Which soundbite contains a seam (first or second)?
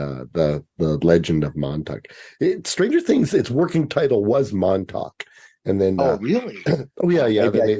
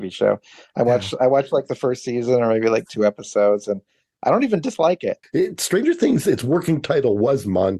second